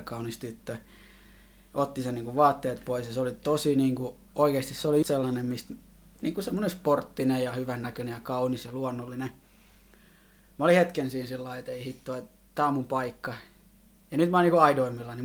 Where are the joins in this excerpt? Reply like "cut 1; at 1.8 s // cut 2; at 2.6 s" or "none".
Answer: cut 1; at 5.0 s

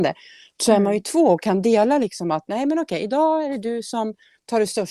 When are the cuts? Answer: none

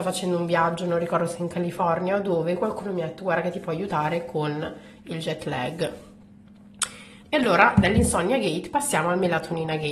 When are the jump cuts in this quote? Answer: cut 1; at 7.2 s

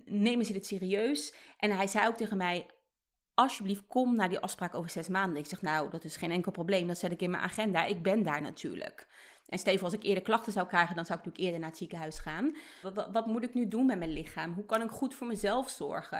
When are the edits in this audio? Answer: cut 1; at 12.8 s

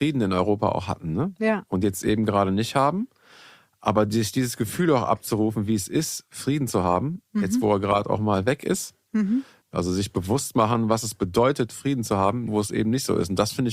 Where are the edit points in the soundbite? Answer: cut 1; at 9.6 s // cut 2; at 12.5 s

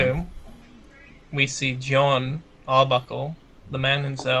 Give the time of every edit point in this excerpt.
none

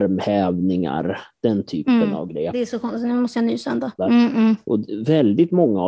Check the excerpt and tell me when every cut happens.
cut 1; at 2.5 s // cut 2; at 4.0 s

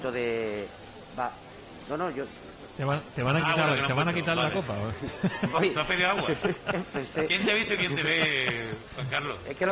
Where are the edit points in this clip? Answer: none

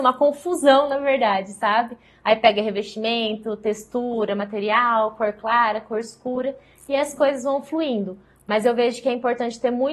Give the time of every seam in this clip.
none

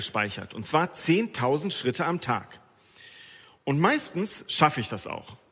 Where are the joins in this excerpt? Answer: none

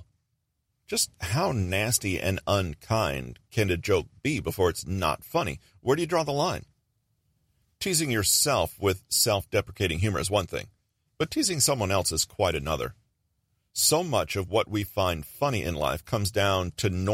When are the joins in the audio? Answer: none

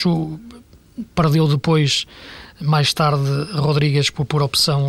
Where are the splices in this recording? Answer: none

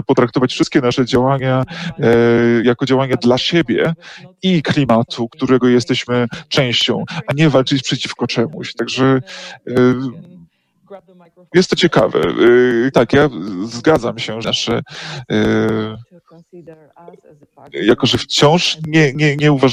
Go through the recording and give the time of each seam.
cut 1; at 12.9 s // cut 2; at 14.4 s

